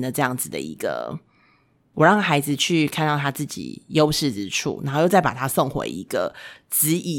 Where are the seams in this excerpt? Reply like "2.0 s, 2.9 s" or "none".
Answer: none